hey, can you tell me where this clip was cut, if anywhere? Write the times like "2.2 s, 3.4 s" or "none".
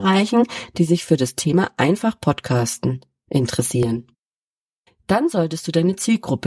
none